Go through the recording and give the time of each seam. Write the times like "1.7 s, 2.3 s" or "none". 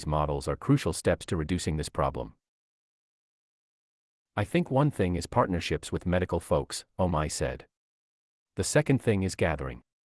none